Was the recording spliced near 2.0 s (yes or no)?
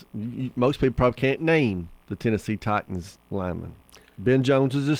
yes